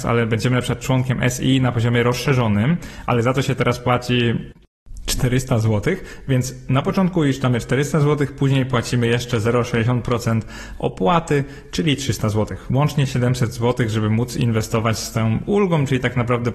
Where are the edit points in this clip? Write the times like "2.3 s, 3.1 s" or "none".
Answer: none